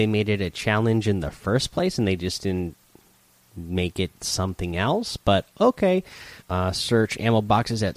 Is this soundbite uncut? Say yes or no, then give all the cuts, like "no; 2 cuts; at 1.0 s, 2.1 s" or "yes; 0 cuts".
no; 1 cut; at 6.4 s